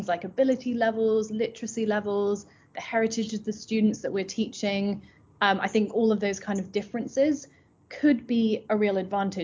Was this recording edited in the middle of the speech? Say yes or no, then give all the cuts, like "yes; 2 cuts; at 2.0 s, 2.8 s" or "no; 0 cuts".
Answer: no; 0 cuts